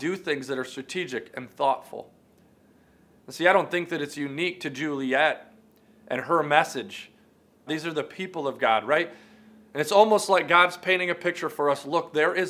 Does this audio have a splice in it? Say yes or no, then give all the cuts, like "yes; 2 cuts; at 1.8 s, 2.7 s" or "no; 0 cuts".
yes; 2 cuts; at 7.7 s, 9.6 s